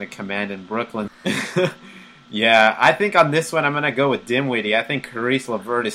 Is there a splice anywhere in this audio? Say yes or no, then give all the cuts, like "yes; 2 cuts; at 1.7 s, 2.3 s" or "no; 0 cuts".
yes; 1 cut; at 1.1 s